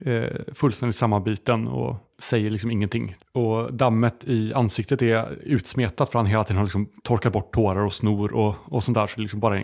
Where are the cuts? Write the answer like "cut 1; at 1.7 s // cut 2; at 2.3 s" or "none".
cut 1; at 3.2 s